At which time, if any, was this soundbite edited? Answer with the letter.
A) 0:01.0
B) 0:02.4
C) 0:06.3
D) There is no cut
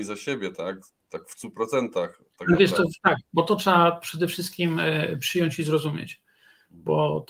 D